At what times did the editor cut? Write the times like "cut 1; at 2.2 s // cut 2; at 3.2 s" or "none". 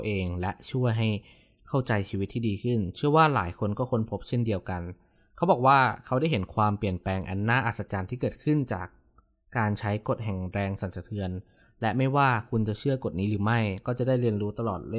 none